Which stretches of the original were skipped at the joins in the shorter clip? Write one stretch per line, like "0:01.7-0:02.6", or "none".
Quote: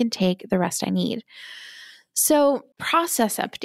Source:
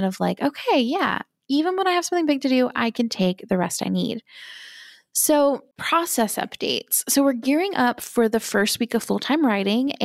none